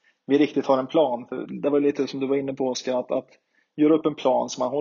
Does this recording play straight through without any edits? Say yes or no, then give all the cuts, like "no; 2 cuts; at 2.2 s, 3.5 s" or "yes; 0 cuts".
yes; 0 cuts